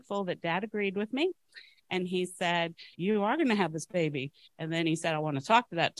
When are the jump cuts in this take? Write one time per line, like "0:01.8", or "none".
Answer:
0:02.9

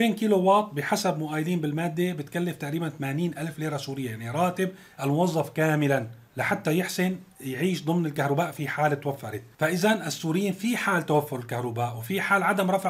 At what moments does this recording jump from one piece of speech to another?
0:06.3

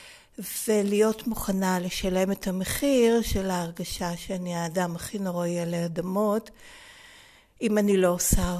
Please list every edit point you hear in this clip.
none

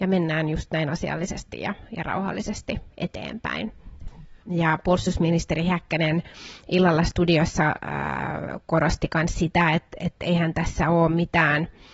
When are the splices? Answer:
0:04.4

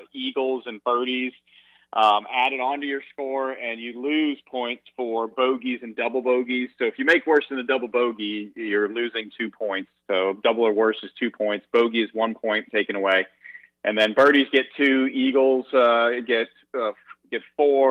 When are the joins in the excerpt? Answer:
none

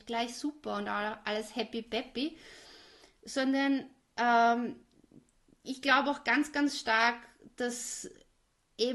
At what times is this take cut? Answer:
none

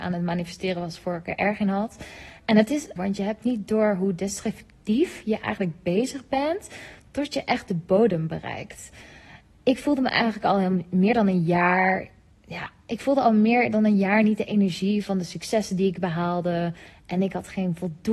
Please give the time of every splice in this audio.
0:03.0

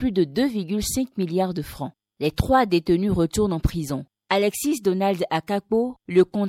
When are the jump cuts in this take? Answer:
none

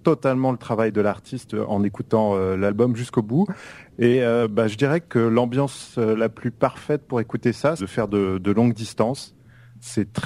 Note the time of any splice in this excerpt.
0:07.8

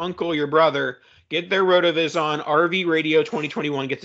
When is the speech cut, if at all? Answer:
none

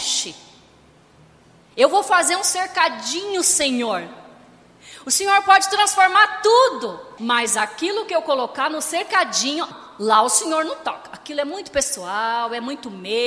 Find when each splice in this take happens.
0:07.2
0:09.7

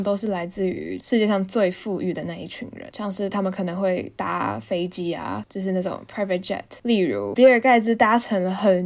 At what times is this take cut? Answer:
0:07.4

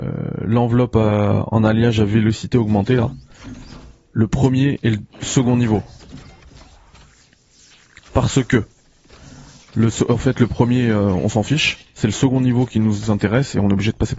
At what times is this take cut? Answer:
none

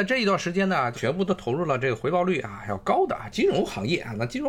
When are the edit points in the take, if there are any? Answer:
0:00.9

